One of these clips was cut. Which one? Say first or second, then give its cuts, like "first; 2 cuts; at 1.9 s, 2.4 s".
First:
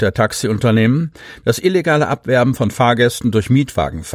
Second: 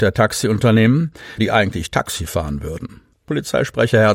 second; 2 cuts; at 1.4 s, 3.1 s